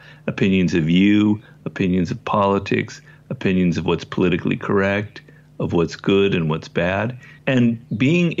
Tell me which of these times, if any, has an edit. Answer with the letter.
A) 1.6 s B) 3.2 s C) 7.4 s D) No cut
C